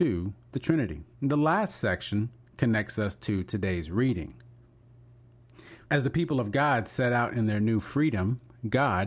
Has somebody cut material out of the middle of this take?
yes; 2 cuts; at 1.1 s, 5.8 s

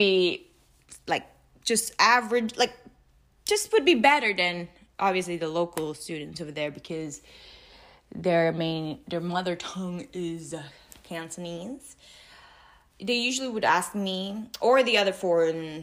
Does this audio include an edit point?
no; 0 cuts

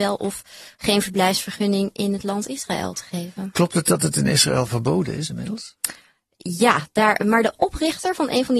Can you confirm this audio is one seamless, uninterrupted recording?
yes; 0 cuts

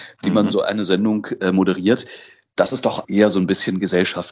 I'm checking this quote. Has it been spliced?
yes; 1 cut; at 3.0 s

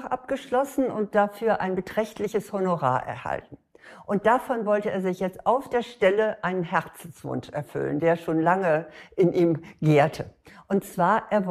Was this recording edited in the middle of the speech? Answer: no; 0 cuts

